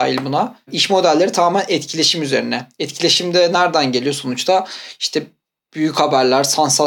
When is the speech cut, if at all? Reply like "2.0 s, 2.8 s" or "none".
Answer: none